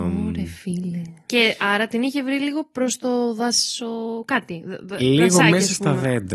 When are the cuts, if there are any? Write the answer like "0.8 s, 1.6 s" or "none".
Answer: 1.3 s